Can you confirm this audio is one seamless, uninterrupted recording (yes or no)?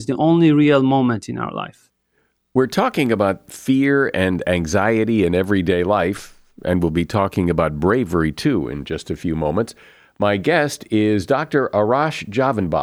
yes